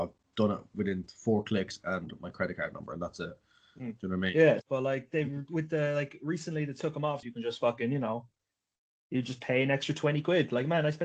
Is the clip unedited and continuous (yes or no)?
no